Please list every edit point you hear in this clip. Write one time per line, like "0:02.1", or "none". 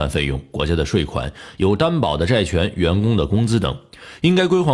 none